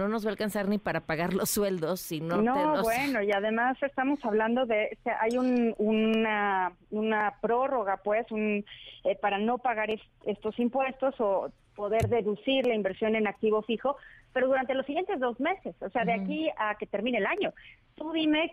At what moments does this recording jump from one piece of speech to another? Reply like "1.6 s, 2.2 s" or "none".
none